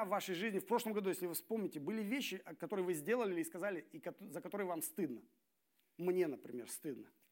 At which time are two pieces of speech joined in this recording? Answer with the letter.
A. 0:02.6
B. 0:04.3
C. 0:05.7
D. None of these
A